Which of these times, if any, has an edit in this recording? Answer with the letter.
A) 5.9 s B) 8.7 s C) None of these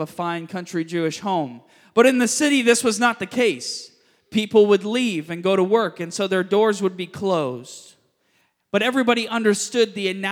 C